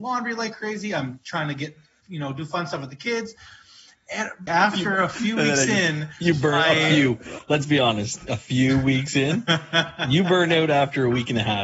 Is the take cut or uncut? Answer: cut